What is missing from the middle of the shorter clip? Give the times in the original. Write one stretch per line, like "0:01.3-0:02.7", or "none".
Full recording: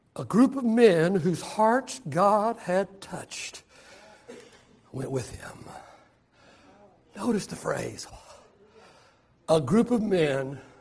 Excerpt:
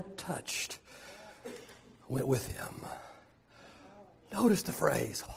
none